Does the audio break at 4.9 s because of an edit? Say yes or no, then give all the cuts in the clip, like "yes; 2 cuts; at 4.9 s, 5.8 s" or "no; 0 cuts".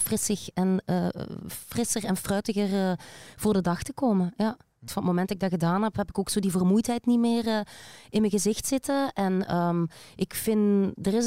yes; 1 cut; at 4.9 s